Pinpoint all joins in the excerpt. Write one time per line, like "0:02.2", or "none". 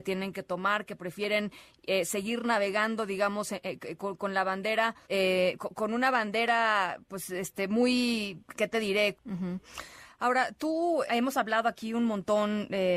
0:05.0
0:09.1
0:11.1